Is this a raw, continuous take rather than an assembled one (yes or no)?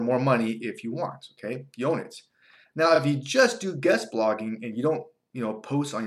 yes